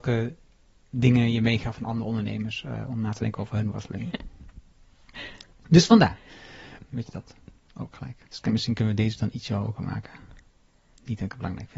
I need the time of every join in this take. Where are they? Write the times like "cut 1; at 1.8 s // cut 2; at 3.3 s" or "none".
cut 1; at 4.1 s // cut 2; at 6.8 s // cut 3; at 8.2 s